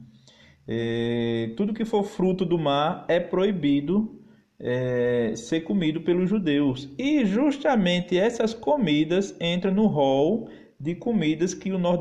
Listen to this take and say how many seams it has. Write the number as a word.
zero